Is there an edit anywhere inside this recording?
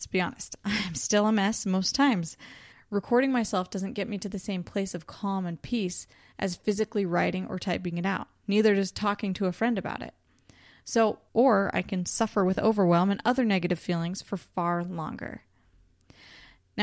yes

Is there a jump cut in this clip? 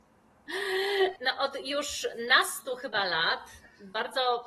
yes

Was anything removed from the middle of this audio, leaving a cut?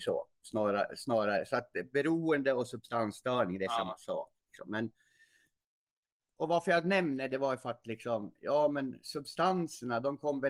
yes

